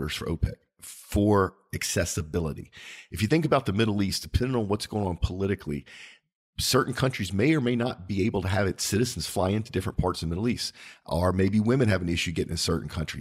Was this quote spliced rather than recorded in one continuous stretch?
no; 0 cuts

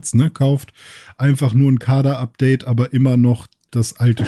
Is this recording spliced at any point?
no; 0 cuts

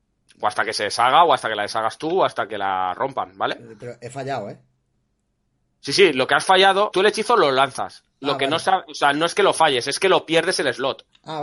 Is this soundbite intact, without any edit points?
no; 1 cut; at 6.9 s

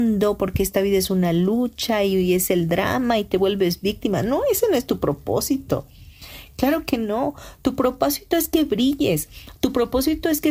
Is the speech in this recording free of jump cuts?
yes; 0 cuts

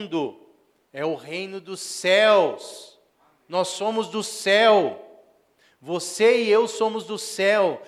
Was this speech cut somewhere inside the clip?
yes; 1 cut; at 3.1 s

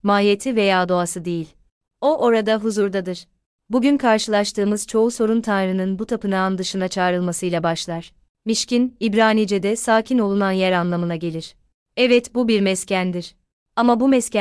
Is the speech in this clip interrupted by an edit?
yes; 2 cuts; at 1.9 s, 8.3 s

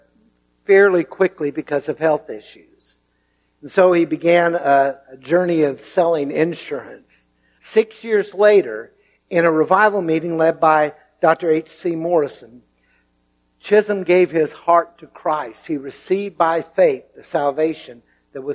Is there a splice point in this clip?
yes; 1 cut; at 7.6 s

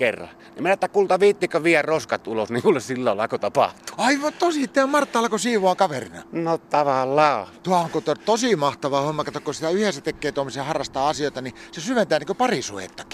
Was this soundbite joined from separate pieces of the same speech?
no; 0 cuts

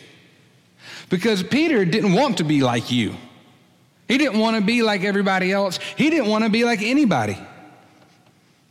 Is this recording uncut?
yes; 0 cuts

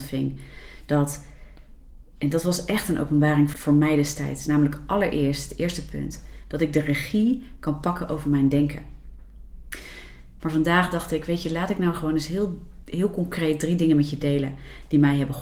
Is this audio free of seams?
no; 2 cuts; at 3.5 s, 10.4 s

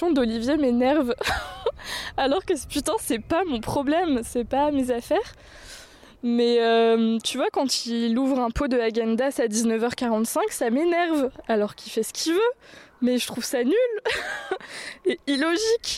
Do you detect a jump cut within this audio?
no; 0 cuts

